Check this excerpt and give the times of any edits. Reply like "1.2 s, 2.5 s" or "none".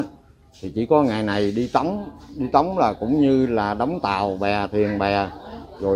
none